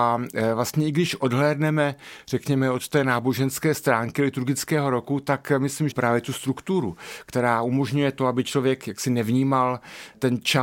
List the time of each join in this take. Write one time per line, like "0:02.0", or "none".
0:05.9